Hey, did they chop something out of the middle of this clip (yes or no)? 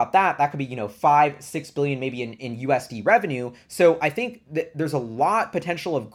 no